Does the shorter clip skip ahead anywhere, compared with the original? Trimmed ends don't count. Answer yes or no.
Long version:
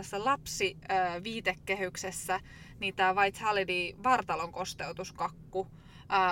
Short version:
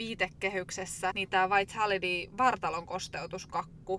yes